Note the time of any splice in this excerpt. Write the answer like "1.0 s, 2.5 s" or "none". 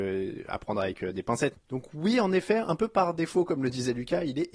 1.5 s